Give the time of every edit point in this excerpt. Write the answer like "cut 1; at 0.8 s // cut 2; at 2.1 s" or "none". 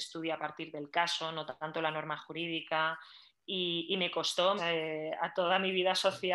cut 1; at 4.6 s